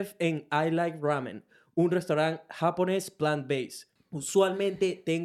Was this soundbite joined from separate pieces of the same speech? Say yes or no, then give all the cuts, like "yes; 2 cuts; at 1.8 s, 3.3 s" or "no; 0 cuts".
yes; 1 cut; at 4.0 s